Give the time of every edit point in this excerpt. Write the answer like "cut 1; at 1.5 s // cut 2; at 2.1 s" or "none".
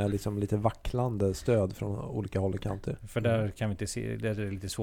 cut 1; at 3.0 s